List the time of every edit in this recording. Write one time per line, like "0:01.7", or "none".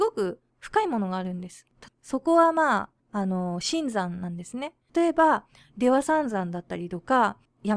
0:01.9
0:04.9